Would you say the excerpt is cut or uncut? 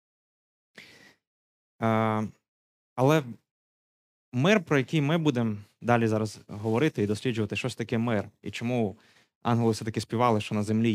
uncut